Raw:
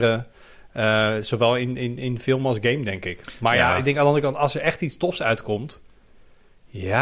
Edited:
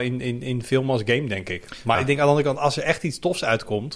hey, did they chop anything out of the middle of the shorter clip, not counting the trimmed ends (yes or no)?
yes